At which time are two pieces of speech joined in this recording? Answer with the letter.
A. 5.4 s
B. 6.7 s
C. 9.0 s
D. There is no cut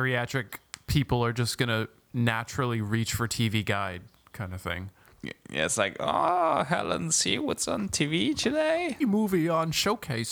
C